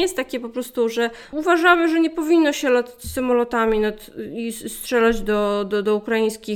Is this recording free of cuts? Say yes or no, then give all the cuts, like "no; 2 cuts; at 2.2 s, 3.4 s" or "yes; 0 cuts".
no; 1 cut; at 1.3 s